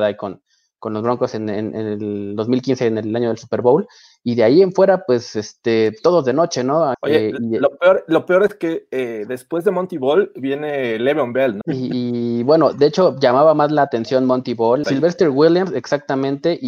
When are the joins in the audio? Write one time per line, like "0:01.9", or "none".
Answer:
0:06.9
0:11.6
0:14.8